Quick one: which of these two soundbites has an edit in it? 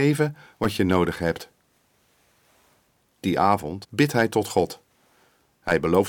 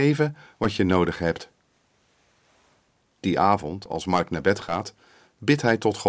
first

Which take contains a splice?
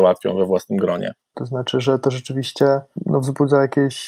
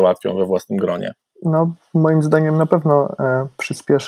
first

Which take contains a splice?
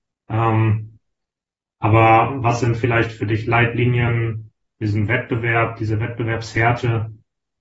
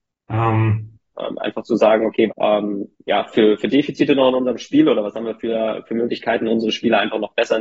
second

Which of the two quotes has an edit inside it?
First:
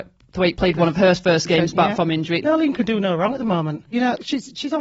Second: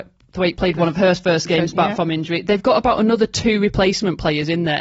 first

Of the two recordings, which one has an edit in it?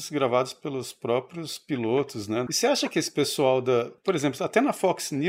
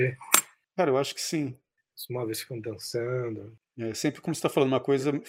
first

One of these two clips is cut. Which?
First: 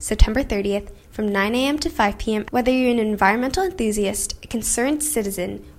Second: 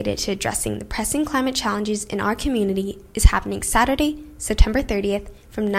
first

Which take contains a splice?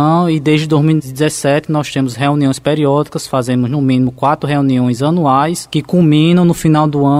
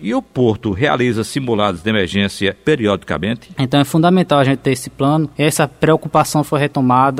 second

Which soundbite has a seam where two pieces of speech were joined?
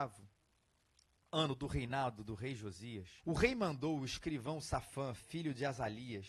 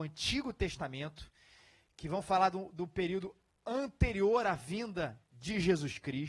first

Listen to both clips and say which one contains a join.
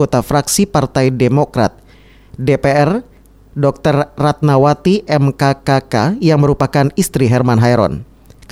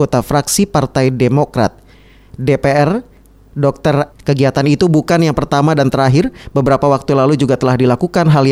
second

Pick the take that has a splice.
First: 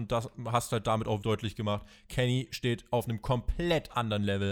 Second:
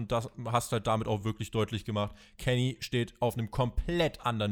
first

